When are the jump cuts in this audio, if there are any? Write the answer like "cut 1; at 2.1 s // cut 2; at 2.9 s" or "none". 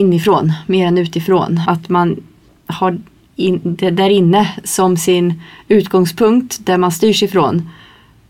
cut 1; at 1.7 s